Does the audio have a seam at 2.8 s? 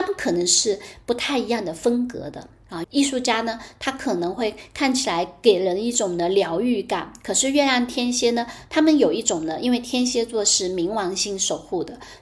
yes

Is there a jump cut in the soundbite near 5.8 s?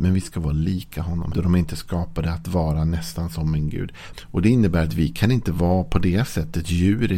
no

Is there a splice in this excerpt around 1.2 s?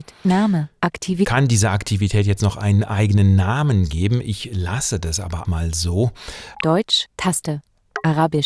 no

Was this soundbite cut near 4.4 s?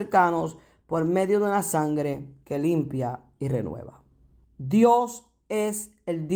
yes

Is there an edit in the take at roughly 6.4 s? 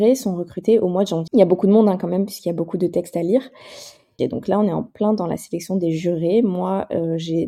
no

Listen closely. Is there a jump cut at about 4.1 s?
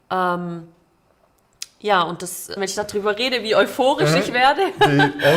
no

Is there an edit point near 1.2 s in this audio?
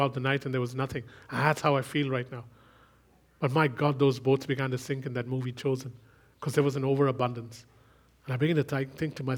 no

